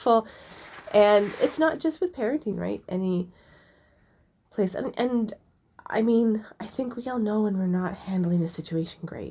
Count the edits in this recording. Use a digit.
1